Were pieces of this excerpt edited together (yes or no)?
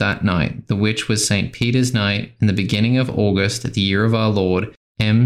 no